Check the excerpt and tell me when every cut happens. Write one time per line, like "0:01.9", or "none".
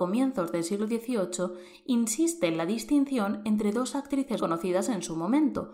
0:04.4